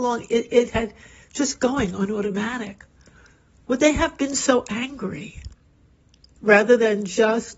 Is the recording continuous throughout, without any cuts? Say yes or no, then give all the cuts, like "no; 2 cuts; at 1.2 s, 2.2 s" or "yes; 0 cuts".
no; 1 cut; at 6.4 s